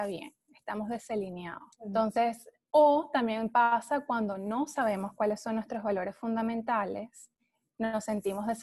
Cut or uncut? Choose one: cut